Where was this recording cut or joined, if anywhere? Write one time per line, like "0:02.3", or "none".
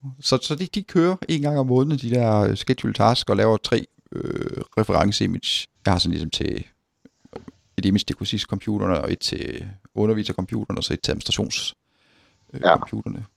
0:05.7